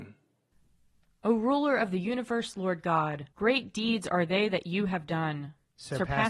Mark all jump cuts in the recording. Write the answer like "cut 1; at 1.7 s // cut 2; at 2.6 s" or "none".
cut 1; at 3.3 s